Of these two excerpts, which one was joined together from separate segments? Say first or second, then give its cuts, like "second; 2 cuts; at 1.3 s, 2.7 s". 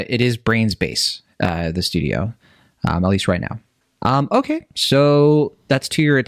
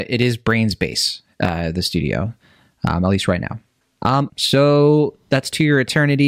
second; 1 cut; at 4.3 s